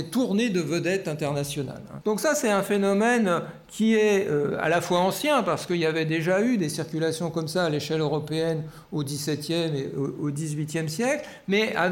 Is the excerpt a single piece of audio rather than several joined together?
no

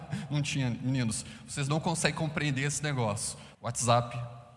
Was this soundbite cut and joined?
yes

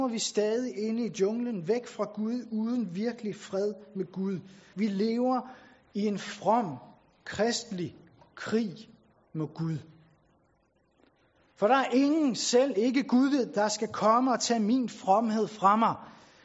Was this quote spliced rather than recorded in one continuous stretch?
yes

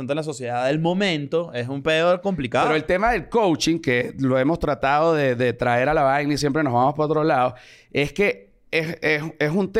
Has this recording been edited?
no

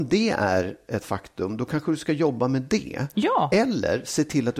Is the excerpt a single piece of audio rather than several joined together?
yes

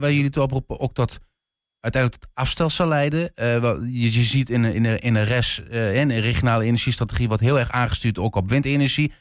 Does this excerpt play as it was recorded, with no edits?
yes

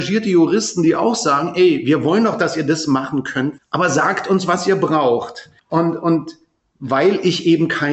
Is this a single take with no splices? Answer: no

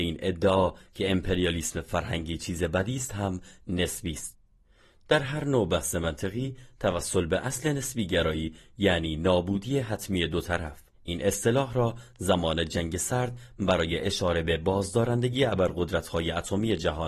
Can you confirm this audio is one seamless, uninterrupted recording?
no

